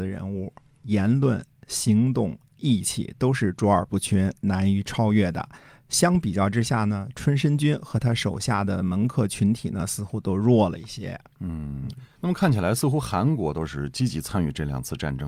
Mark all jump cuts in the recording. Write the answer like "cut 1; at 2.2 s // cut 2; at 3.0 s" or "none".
none